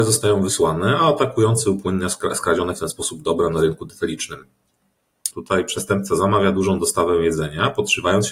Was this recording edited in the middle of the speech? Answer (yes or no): yes